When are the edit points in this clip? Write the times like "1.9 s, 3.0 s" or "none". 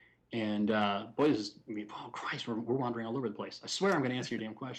none